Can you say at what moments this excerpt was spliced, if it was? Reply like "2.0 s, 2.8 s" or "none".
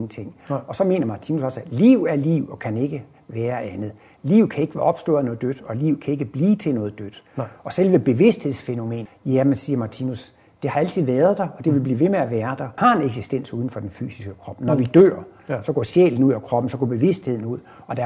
9.1 s, 12.8 s